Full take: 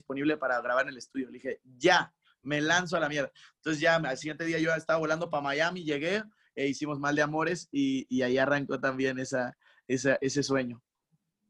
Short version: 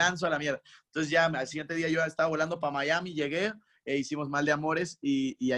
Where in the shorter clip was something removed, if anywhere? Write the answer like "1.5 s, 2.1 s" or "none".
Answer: none